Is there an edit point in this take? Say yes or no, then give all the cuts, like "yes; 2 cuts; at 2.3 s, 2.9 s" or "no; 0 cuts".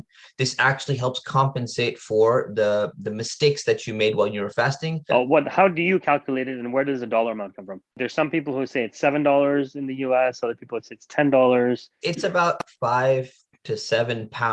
yes; 2 cuts; at 5.1 s, 12.0 s